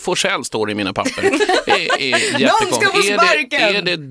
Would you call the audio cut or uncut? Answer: uncut